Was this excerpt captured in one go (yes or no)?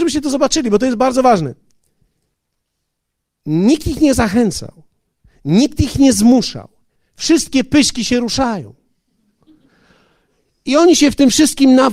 no